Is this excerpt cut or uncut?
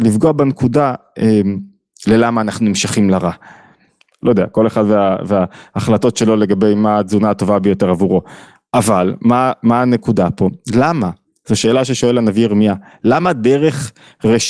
cut